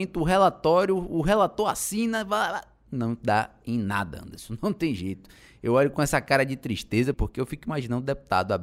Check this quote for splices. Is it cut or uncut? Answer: cut